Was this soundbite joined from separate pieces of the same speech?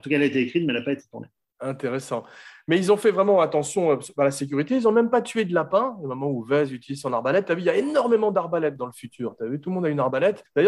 no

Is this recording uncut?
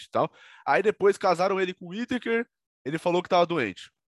yes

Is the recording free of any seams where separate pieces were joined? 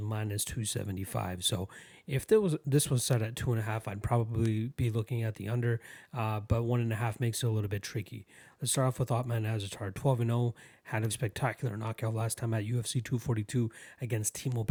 no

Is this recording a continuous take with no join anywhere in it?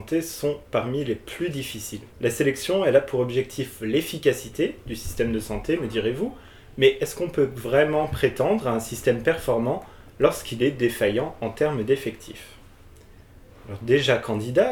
no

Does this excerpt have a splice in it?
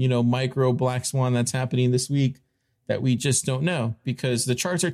yes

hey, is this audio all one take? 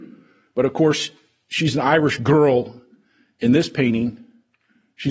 yes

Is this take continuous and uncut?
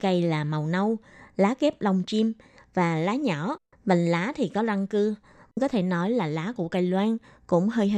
no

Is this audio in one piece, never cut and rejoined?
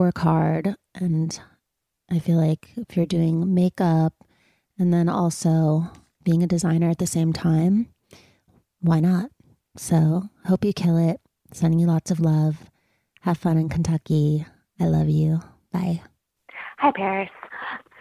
yes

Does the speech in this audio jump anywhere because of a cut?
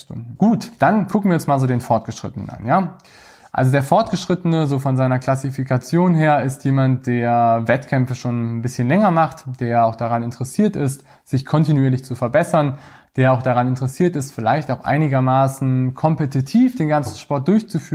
no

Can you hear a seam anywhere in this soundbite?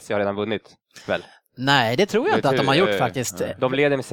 no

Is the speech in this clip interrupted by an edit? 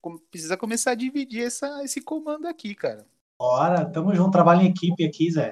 no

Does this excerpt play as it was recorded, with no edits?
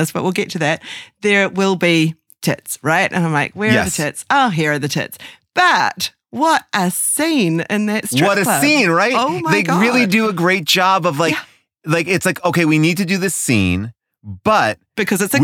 yes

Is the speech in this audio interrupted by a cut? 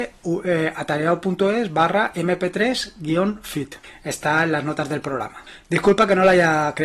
no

